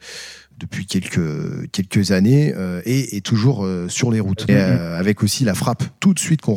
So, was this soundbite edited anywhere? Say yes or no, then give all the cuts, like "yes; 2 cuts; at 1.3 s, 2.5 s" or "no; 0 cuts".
yes; 1 cut; at 4.5 s